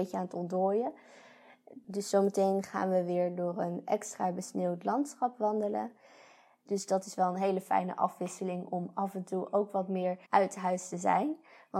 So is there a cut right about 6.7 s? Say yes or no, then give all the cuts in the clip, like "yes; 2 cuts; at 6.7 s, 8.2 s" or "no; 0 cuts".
yes; 2 cuts; at 6.7 s, 10.2 s